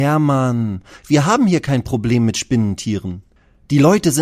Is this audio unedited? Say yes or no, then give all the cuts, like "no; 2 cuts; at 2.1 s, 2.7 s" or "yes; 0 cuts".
no; 1 cut; at 1.0 s